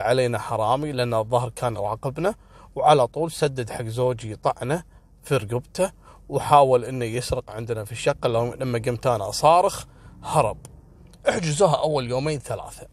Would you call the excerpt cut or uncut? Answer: uncut